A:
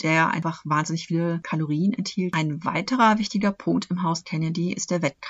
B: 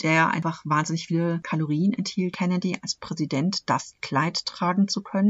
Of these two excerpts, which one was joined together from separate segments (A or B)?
B